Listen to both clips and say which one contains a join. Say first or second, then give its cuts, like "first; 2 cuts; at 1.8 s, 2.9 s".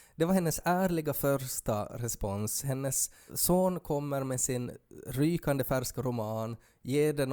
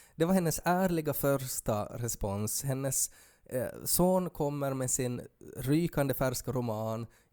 first; 1 cut; at 3.3 s